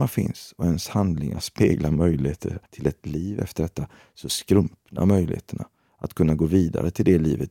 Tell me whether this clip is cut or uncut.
cut